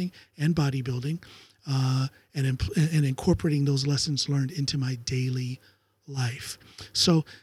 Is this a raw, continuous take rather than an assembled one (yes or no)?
yes